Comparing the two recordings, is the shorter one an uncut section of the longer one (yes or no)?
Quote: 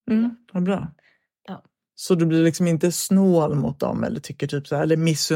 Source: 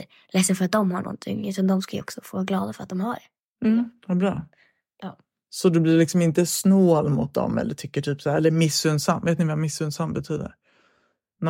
yes